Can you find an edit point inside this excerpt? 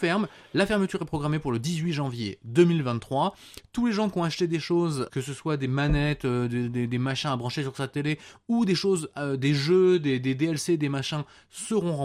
yes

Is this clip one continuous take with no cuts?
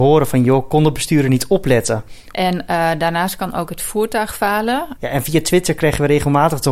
no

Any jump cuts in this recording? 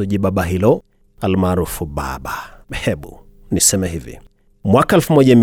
yes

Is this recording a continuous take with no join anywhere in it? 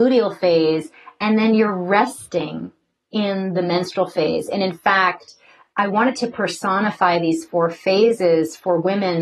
yes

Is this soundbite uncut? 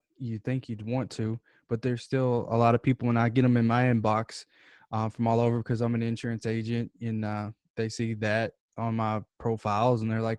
yes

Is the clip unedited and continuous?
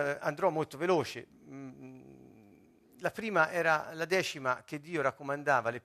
yes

